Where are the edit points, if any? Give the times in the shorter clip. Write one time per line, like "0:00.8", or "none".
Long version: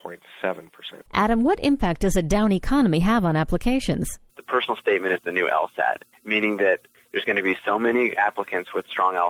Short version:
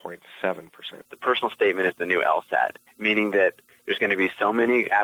0:01.0